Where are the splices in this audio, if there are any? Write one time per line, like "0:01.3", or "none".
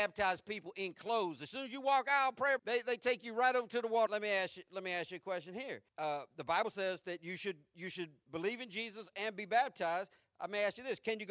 0:02.6
0:04.1
0:05.9